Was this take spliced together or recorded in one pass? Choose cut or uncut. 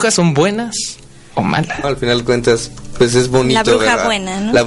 cut